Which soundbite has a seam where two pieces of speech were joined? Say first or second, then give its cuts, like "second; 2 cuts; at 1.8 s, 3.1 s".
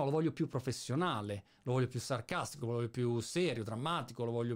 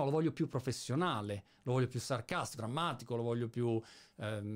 second; 1 cut; at 2.6 s